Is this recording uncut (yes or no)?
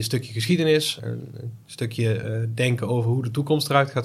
yes